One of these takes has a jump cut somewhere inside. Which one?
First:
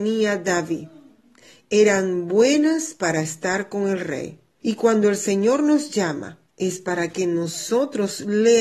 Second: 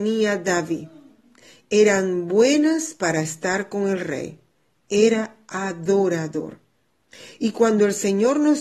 first; 2 cuts; at 4.6 s, 6.5 s

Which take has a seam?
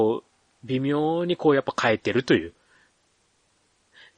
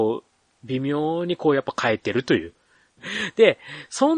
second; 1 cut; at 3.0 s

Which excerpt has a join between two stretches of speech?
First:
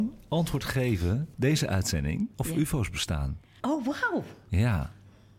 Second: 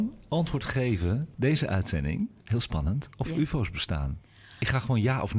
first; 2 cuts; at 2.3 s, 3.6 s

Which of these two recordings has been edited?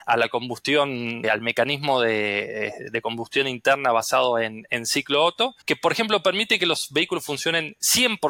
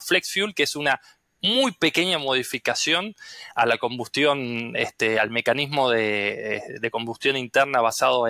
first; 2 cuts; at 1.2 s, 5.6 s

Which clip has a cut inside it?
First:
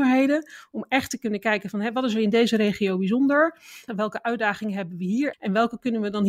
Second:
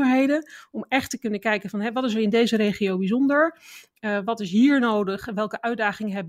first; 2 cuts; at 3.9 s, 5.3 s

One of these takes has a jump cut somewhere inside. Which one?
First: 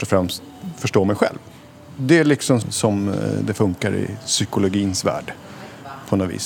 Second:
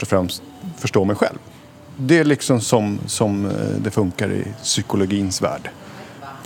first; 1 cut; at 2.6 s

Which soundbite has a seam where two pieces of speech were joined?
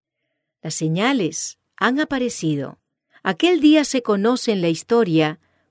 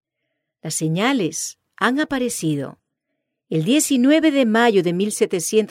first; 1 cut; at 3.1 s

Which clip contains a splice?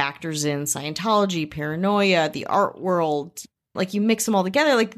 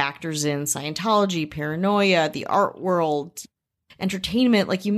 first; 1 cut; at 3.8 s

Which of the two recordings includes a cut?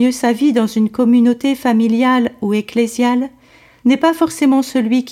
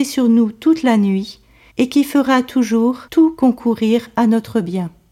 second; 2 cuts; at 1.7 s, 3.1 s

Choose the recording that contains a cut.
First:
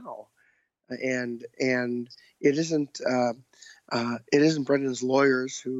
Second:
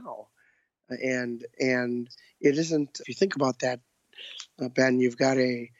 second; 1 cut; at 3.0 s

